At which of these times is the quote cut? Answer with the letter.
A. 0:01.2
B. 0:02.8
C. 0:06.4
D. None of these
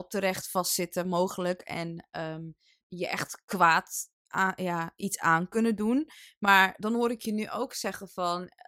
B